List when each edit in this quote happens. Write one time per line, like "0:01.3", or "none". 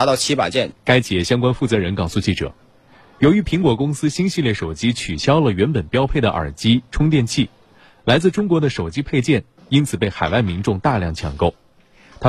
none